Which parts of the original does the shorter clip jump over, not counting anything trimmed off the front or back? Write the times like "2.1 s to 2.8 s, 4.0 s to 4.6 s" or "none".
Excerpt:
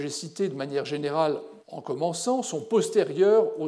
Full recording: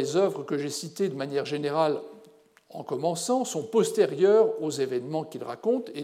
2.2 s to 2.6 s